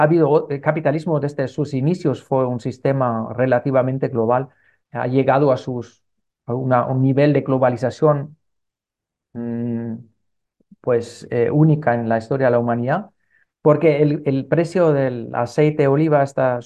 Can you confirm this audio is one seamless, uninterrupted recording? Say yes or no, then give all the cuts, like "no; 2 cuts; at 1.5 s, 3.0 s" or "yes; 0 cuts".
no; 2 cuts; at 4.8 s, 13.5 s